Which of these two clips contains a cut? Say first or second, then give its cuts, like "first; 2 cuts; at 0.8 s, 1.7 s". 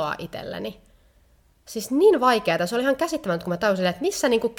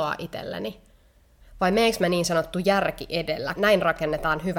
second; 2 cuts; at 1.4 s, 3.6 s